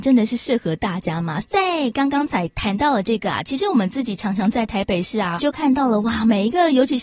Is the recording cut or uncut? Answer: cut